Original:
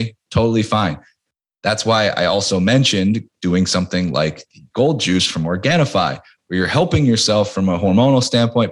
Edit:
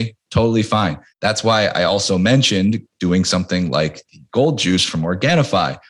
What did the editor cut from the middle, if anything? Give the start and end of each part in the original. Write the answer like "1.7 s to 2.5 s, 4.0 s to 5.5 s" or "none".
1.1 s to 1.5 s